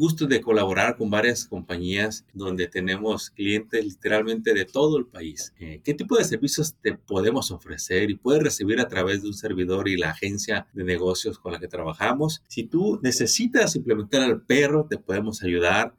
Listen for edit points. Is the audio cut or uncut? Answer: cut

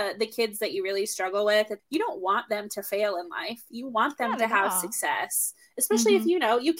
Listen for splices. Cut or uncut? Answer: cut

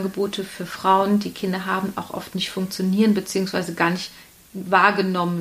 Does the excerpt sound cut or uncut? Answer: uncut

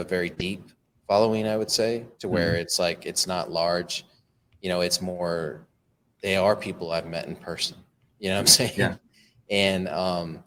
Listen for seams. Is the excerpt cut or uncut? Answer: uncut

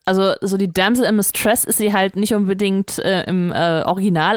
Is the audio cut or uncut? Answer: uncut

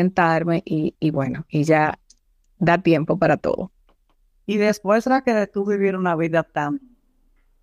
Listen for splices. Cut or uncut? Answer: uncut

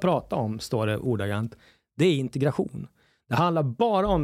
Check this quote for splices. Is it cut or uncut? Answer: uncut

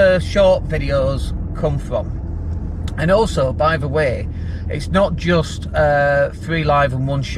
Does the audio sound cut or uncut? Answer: uncut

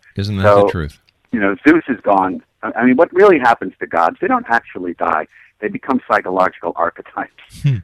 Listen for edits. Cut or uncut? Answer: uncut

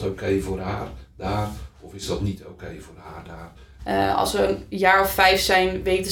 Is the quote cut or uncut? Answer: cut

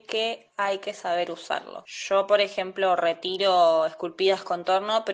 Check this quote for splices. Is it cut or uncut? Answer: uncut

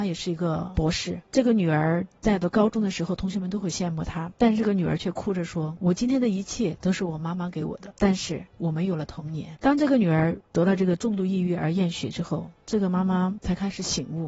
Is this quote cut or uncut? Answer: uncut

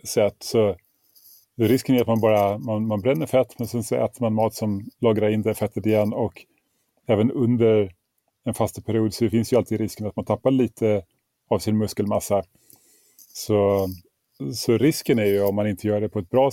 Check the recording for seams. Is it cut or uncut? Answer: uncut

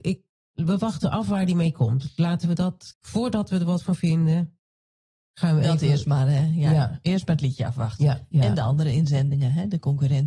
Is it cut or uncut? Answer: cut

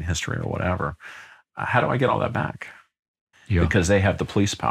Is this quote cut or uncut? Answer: cut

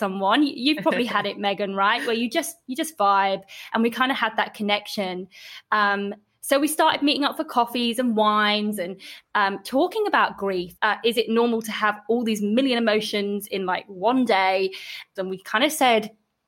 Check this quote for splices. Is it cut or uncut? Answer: cut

